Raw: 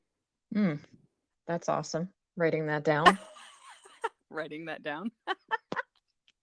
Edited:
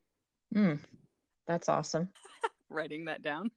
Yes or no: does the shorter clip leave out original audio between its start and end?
yes